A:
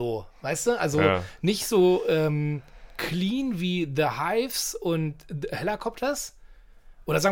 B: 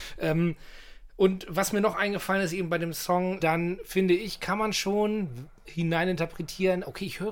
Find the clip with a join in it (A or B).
B